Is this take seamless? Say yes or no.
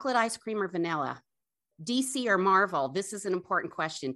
no